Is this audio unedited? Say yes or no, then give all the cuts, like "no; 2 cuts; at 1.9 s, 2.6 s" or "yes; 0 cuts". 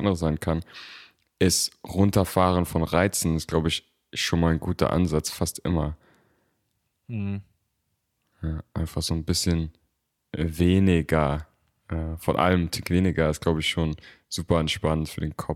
yes; 0 cuts